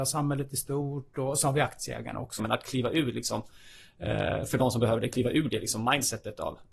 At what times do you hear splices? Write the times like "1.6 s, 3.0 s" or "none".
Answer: 2.4 s